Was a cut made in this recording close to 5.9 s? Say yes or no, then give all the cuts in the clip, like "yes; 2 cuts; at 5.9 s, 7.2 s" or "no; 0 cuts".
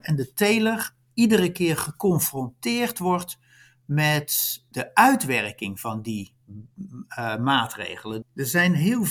no; 1 cut; at 8.2 s